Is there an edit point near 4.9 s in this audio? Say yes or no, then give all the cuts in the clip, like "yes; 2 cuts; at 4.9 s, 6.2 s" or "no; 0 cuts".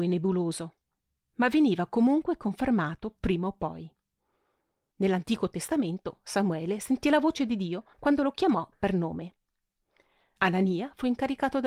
yes; 3 cuts; at 4.9 s, 7.9 s, 10.4 s